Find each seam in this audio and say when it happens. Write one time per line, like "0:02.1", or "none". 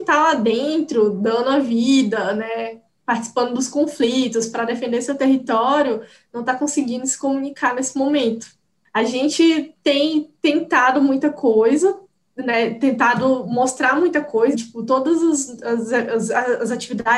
0:14.5